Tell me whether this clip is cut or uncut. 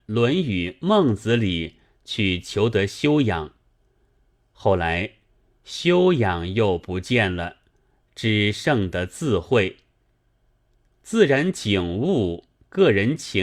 uncut